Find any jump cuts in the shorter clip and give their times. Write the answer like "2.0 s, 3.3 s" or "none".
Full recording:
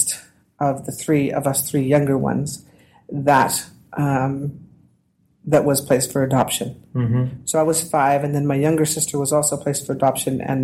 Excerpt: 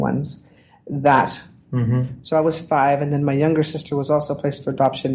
1.6 s